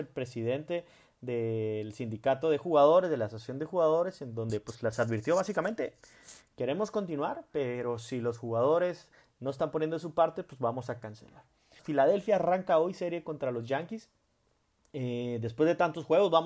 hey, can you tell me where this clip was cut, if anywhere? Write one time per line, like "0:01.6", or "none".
0:11.8